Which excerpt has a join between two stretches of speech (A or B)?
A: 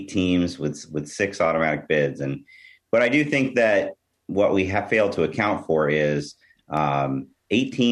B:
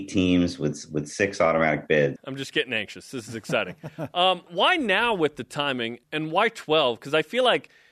B